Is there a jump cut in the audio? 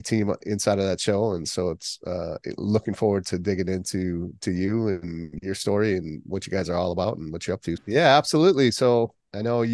yes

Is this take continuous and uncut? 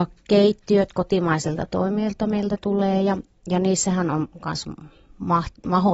yes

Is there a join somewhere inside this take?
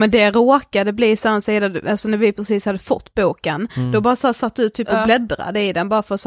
no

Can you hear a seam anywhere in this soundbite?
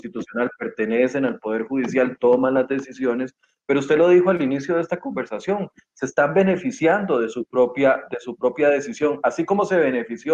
no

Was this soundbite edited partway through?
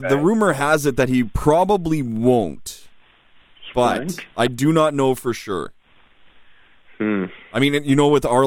no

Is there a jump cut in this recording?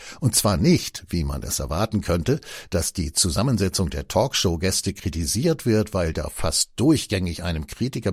no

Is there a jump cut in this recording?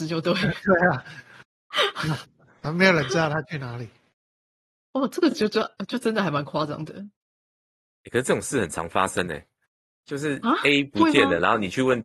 no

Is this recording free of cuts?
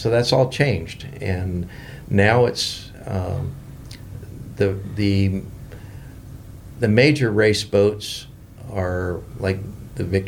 yes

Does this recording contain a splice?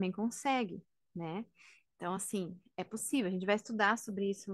no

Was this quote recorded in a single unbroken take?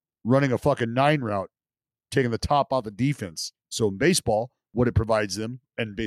no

